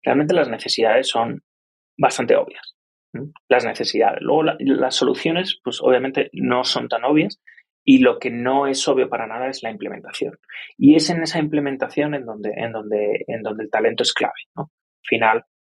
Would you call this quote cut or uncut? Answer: uncut